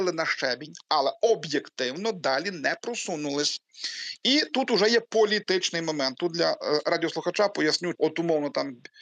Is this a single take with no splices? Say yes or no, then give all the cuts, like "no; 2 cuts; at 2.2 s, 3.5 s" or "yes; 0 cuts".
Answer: no; 1 cut; at 8.0 s